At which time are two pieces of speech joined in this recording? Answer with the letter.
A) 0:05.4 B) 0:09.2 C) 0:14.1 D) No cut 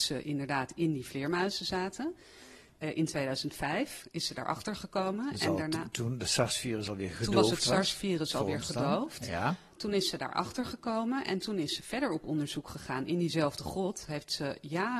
D